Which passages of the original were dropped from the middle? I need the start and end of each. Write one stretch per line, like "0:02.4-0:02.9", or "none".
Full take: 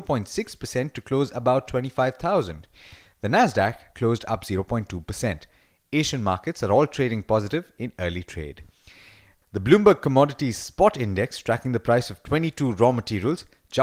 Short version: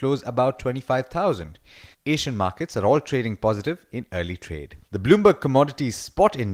0:03.0-0:05.8
0:08.7-0:09.5